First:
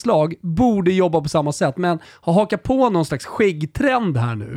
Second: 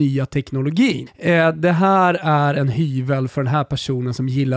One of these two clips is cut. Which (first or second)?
second